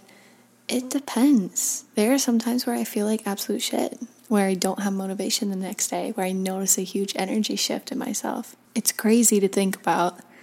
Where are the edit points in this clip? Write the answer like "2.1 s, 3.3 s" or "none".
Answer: 8.7 s